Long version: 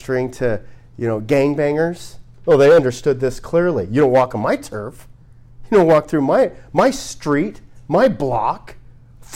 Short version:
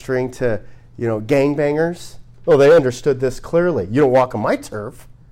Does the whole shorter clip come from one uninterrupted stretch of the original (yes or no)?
yes